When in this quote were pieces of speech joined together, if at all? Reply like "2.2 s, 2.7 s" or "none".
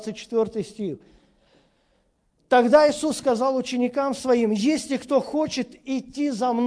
none